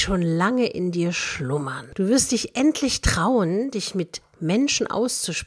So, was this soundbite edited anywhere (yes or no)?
no